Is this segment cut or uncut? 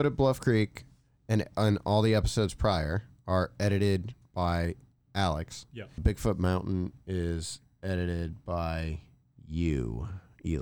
cut